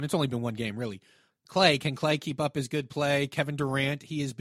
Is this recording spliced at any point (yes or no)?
yes